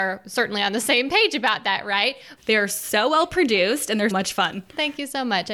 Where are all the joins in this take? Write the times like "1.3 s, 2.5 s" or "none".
2.4 s, 4.1 s